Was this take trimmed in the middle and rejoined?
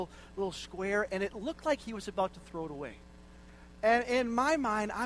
no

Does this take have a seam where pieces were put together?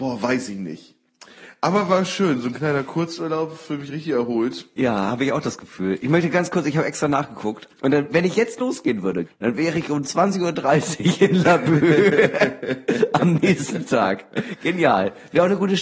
yes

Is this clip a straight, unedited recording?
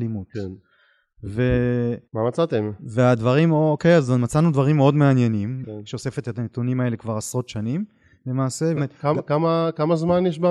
no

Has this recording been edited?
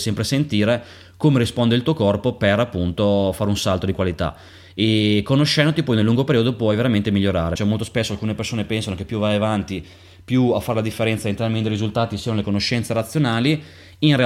yes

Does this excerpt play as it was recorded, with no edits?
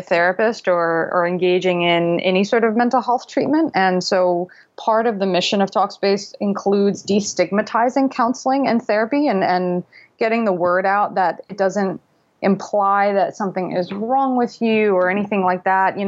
yes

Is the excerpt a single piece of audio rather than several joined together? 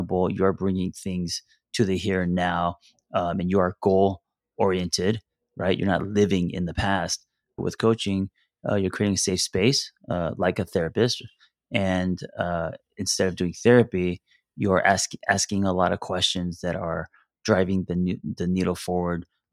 no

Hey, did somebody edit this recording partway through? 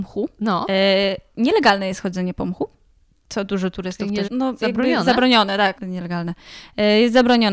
yes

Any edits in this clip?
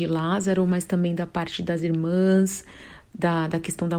no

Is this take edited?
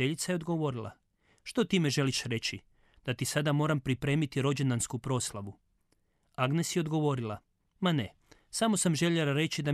no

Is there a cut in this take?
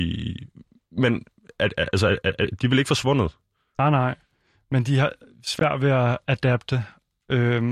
no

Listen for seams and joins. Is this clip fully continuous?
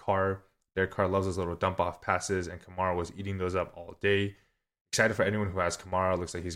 yes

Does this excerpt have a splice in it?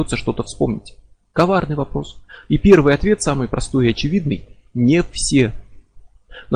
yes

